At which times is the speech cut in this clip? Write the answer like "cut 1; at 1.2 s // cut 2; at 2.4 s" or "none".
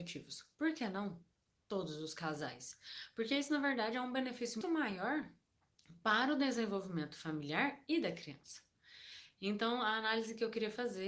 cut 1; at 4.6 s